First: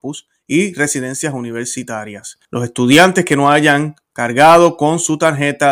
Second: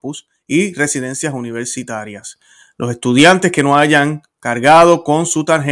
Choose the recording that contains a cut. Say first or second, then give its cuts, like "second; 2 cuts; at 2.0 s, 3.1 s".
first; 1 cut; at 2.4 s